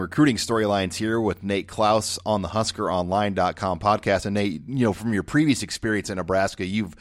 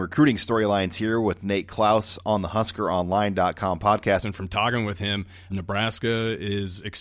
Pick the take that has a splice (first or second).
second